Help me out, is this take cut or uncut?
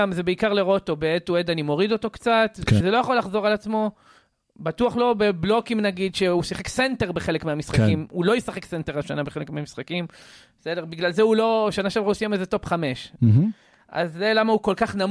cut